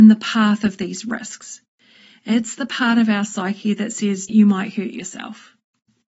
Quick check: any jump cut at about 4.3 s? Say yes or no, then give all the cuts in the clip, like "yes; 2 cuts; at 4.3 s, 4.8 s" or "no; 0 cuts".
yes; 1 cut; at 4.3 s